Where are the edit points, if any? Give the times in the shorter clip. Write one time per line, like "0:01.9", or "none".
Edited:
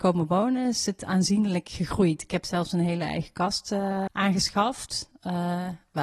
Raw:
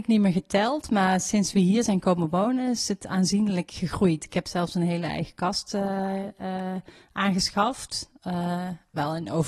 0:04.1